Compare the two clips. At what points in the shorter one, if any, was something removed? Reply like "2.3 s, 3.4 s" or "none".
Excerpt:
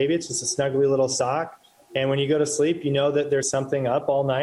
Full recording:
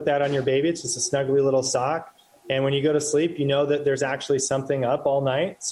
3.4 s